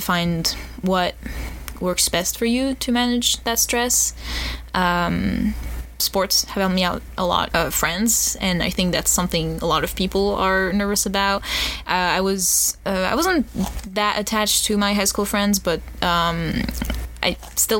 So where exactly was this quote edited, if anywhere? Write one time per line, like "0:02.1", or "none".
0:07.5